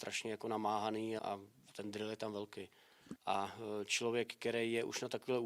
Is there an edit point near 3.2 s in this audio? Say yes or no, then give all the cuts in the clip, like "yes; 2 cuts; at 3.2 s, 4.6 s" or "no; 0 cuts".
yes; 2 cuts; at 1.2 s, 3.2 s